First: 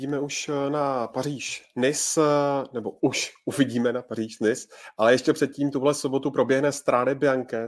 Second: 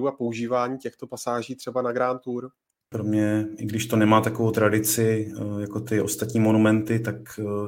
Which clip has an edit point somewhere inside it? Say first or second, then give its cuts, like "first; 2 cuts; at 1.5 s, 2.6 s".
second; 1 cut; at 2.9 s